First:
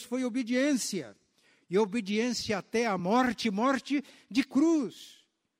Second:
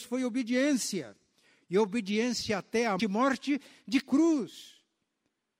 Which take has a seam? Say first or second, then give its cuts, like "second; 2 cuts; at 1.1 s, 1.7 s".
second; 1 cut; at 3.0 s